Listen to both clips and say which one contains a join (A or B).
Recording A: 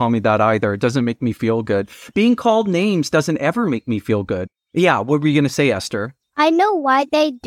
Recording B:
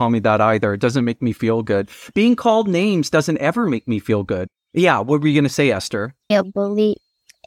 B